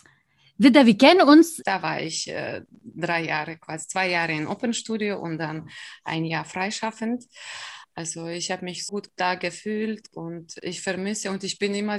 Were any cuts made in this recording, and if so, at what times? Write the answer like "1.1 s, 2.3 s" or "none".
1.6 s, 7.8 s, 8.9 s